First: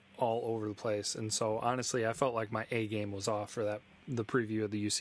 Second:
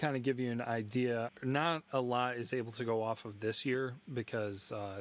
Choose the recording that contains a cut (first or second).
second